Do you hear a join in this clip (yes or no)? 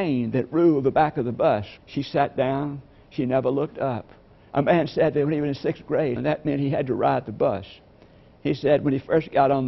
yes